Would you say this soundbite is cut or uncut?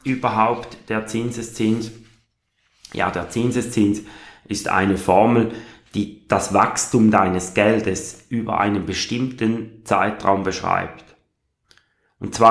uncut